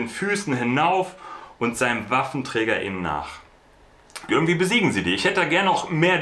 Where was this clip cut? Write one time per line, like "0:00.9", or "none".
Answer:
0:04.3